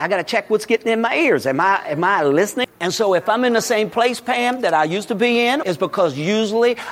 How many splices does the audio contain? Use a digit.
2